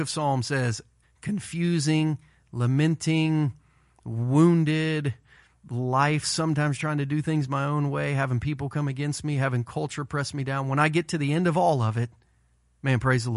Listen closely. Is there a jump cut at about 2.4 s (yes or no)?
no